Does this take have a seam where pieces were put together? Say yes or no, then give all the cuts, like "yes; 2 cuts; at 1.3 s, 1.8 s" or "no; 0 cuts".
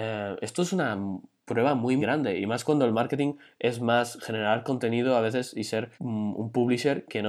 yes; 2 cuts; at 2.0 s, 5.9 s